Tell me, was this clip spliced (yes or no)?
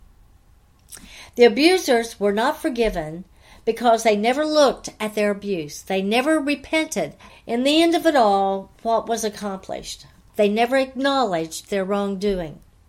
yes